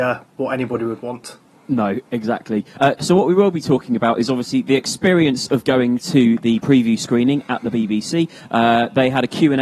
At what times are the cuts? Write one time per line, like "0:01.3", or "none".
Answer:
none